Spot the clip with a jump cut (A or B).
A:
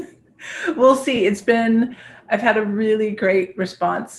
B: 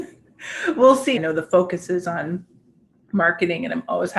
B